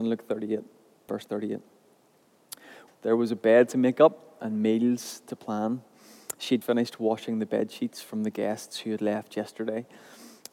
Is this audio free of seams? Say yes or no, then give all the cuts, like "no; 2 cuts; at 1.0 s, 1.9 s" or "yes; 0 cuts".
no; 3 cuts; at 1.1 s, 2.9 s, 6.6 s